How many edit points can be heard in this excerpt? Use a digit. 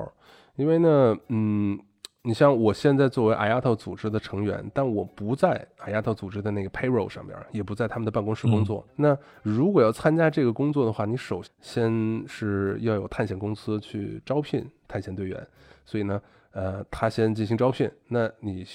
2